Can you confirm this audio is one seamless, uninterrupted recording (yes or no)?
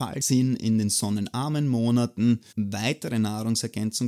no